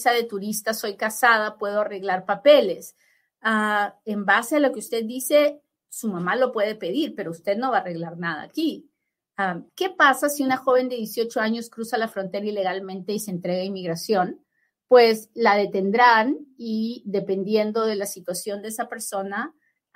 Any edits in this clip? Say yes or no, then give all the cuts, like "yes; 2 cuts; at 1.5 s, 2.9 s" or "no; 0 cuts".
yes; 1 cut; at 9.7 s